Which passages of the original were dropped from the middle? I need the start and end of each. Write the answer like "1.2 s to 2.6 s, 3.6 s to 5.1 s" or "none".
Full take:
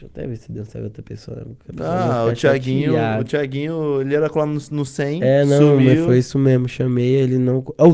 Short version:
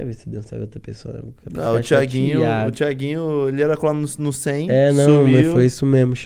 1.9 s to 2.2 s

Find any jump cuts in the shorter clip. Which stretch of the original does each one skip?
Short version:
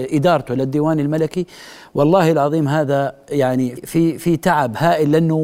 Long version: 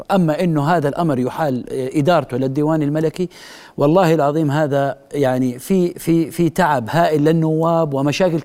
5.6 s to 5.9 s

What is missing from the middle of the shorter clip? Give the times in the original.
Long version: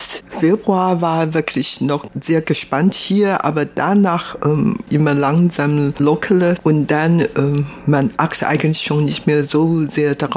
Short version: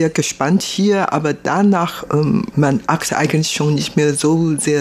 4.8 s to 7.8 s

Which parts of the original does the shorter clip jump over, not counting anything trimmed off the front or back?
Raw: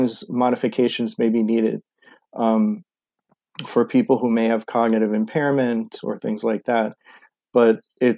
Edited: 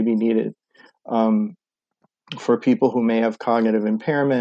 none

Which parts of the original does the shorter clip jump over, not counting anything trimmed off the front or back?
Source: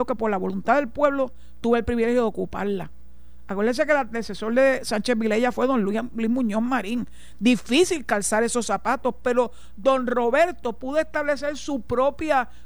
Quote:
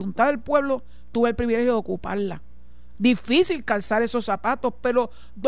3.4 s to 7.4 s

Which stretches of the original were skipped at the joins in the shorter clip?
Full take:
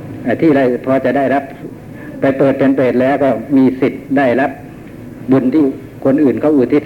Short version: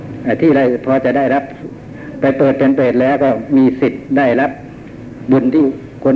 none

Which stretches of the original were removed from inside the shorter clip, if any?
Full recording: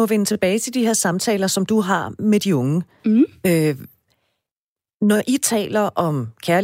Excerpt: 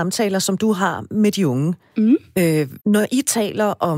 3.9 s to 5.0 s

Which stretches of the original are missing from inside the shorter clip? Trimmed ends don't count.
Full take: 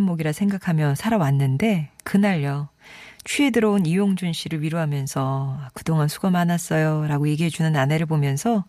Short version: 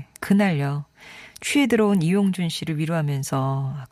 none

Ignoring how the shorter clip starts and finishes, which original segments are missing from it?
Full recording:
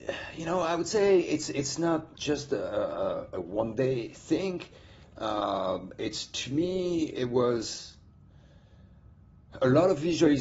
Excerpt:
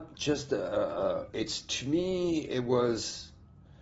3.3 s to 5.9 s

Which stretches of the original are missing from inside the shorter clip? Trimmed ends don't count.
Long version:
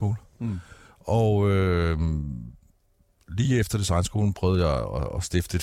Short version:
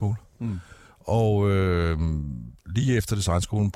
2.6 s to 3.2 s

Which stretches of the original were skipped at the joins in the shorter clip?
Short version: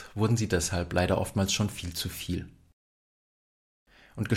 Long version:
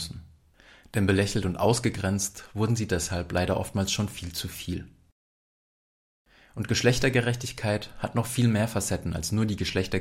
none

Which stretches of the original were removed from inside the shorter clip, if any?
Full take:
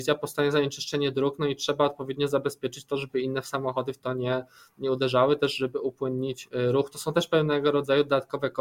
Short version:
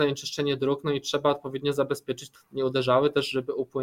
2.9 s to 4.6 s

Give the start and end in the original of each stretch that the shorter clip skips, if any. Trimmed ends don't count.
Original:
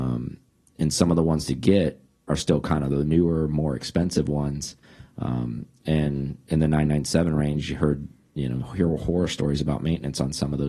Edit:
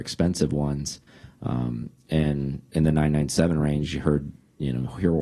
none

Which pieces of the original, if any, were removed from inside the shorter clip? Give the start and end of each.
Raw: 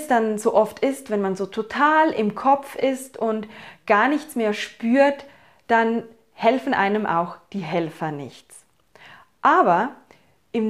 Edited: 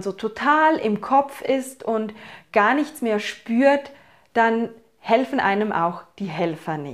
none

